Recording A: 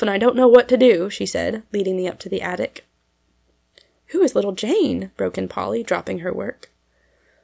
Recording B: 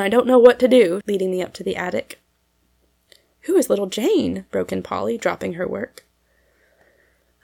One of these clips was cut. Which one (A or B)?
B